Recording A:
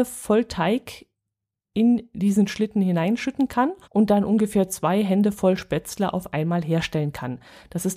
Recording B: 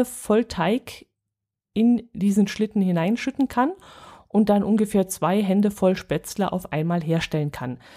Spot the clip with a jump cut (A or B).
A